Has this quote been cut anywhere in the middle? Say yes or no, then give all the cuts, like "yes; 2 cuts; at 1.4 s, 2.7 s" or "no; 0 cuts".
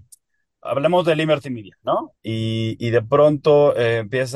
yes; 1 cut; at 2.2 s